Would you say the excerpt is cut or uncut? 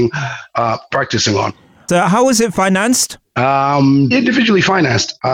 cut